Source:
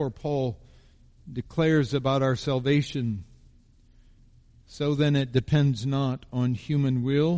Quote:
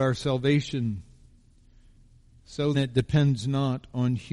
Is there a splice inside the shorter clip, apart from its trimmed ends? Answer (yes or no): yes